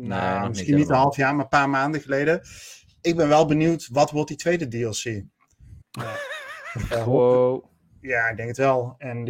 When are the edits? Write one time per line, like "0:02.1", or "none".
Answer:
0:05.8
0:06.9